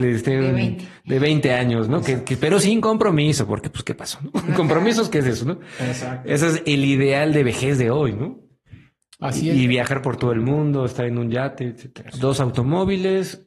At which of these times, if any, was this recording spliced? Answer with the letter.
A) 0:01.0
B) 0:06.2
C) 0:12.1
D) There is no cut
C